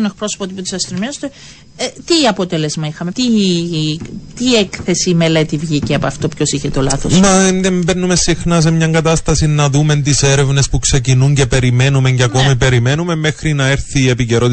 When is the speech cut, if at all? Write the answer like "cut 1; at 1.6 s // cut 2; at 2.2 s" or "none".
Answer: cut 1; at 3.1 s